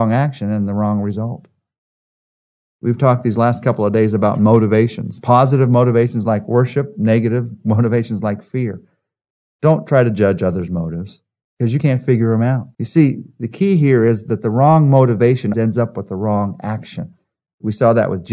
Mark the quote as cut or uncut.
cut